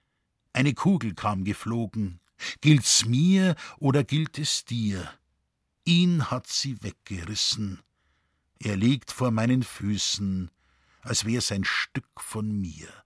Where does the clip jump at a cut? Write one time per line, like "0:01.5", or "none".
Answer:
none